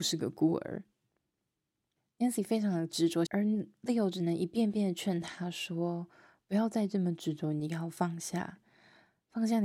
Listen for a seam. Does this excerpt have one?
yes; 1 cut; at 3.3 s

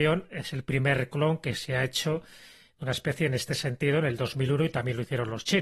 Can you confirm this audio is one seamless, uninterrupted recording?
yes; 0 cuts

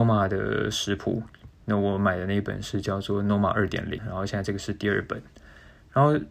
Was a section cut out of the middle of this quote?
yes; 1 cut; at 4.0 s

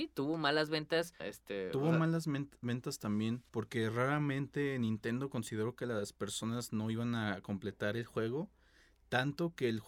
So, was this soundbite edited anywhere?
yes; 2 cuts; at 1.2 s, 3.5 s

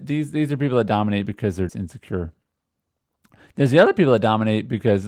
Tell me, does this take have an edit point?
yes; 1 cut; at 1.7 s

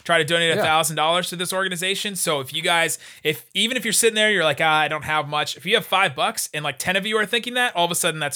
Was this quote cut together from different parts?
no; 0 cuts

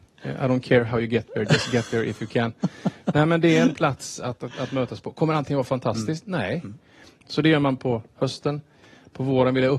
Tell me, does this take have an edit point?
yes; 1 cut; at 7.2 s

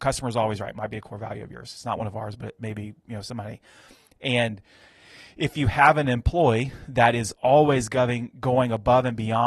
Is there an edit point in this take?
no; 0 cuts

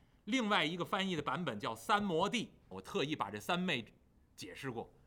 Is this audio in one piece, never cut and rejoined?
no; 1 cut; at 2.7 s

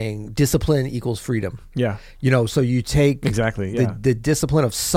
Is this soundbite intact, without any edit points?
yes; 0 cuts

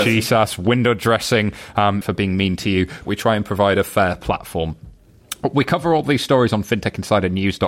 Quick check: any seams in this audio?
yes; 2 cuts; at 2.0 s, 3.0 s

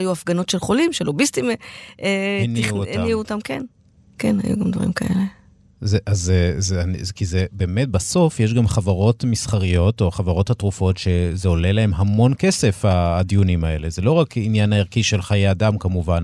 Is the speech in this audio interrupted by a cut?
no; 0 cuts

